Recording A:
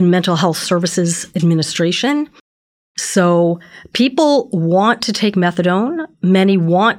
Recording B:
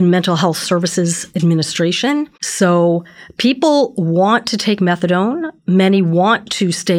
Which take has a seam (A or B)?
B